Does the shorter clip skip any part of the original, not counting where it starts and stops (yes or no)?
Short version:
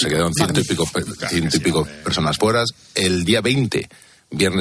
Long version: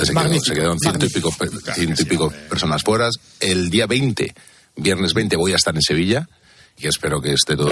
no